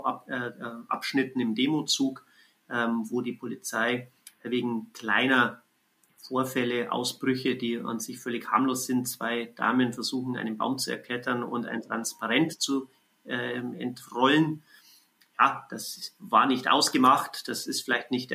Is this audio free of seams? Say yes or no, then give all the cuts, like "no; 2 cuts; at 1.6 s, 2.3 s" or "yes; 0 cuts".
yes; 0 cuts